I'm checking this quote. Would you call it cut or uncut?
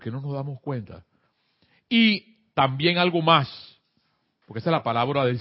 uncut